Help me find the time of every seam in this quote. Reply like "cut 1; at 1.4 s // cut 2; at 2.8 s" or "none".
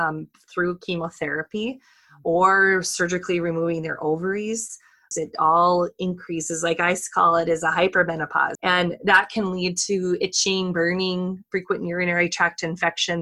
cut 1; at 5.1 s // cut 2; at 8.6 s